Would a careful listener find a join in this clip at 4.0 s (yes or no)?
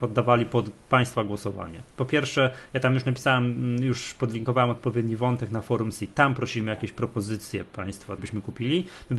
no